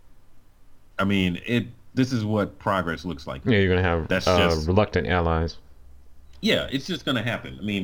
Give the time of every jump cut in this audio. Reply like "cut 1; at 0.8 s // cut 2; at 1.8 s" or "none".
cut 1; at 3.4 s